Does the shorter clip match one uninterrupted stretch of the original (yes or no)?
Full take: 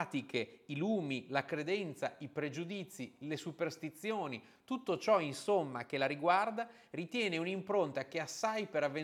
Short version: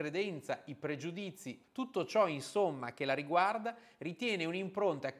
no